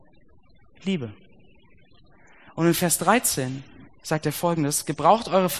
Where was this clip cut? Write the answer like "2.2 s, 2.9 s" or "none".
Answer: 3.9 s